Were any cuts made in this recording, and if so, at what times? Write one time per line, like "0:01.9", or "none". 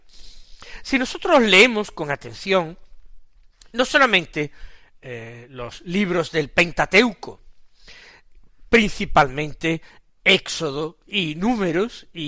none